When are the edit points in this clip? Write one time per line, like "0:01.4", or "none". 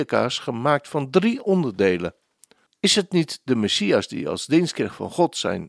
0:02.7